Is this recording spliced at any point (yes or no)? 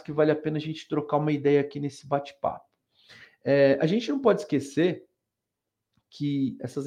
no